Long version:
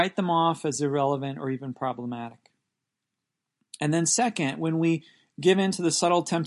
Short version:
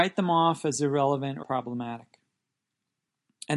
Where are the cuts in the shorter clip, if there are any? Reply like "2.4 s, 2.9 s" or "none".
1.4 s